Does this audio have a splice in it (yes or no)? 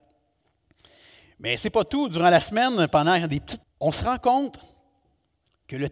yes